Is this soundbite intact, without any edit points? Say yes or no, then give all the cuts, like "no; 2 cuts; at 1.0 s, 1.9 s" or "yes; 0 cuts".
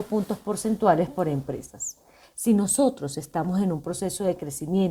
no; 1 cut; at 2.2 s